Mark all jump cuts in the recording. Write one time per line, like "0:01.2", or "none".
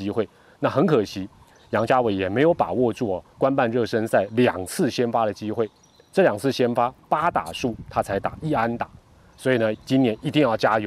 0:09.7